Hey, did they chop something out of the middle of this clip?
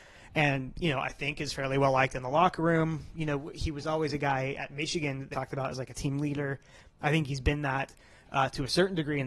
yes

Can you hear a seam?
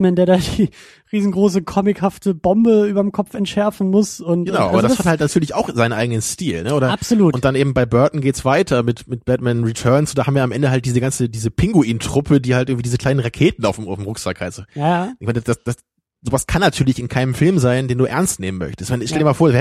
no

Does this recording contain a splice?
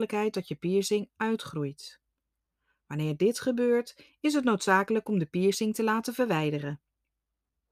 no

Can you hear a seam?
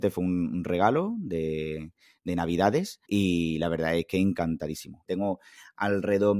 yes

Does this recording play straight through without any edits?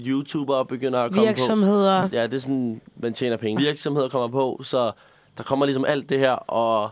no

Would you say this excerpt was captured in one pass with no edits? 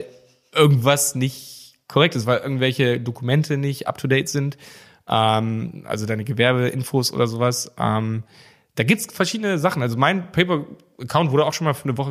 yes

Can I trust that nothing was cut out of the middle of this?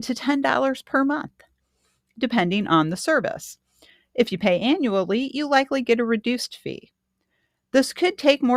yes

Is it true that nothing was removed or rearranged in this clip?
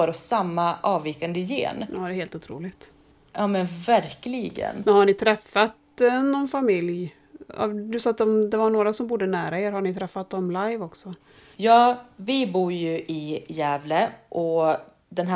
yes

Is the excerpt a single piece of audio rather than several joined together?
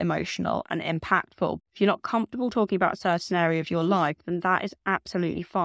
no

